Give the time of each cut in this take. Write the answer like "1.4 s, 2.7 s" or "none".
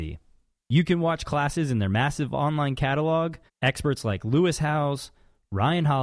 3.5 s